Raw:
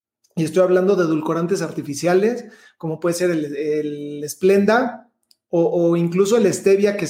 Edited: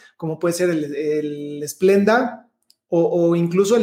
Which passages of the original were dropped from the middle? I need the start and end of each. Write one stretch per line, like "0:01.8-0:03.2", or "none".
none